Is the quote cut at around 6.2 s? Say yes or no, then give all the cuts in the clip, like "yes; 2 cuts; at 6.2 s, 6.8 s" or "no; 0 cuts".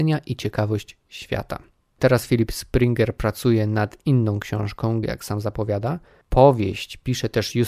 no; 2 cuts; at 2.0 s, 5.0 s